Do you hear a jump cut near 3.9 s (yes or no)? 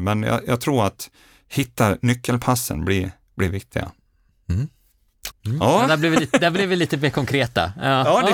no